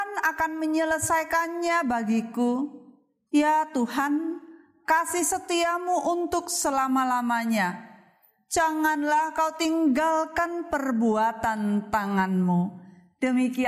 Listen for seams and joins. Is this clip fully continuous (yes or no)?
yes